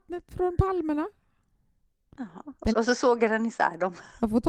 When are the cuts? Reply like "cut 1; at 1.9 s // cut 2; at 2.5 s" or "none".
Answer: cut 1; at 2.7 s